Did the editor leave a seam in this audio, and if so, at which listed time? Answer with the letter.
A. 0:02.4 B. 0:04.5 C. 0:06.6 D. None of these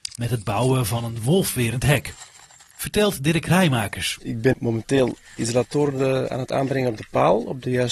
B